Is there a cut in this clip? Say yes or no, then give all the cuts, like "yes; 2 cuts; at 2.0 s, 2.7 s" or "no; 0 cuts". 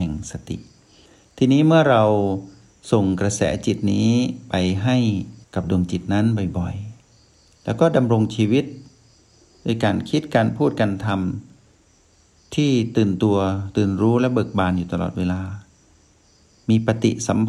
yes; 1 cut; at 5.4 s